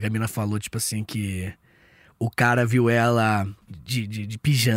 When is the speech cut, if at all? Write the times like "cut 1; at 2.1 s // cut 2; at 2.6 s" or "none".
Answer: cut 1; at 3.6 s